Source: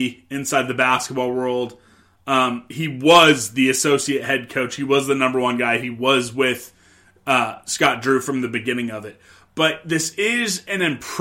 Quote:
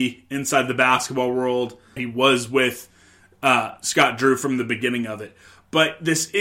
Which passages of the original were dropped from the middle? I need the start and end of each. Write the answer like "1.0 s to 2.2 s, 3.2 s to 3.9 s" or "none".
2.0 s to 5.8 s